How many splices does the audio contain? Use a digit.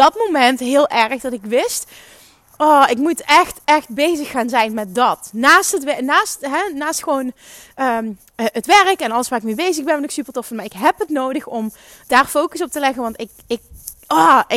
1